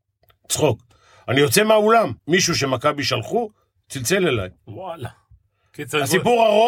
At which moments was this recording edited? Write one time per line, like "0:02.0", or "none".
0:02.2